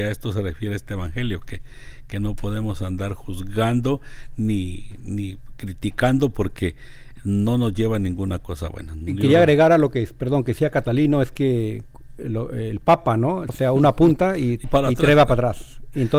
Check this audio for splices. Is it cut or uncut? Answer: cut